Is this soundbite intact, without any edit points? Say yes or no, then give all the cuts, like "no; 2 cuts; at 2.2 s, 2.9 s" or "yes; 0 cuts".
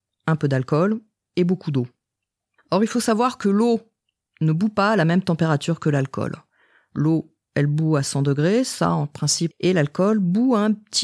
no; 1 cut; at 9.5 s